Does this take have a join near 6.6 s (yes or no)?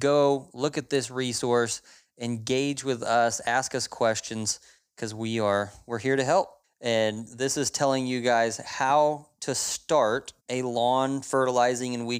yes